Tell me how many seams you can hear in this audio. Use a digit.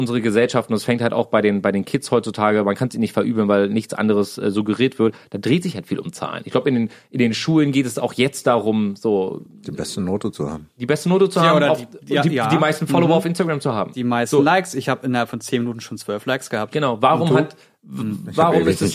0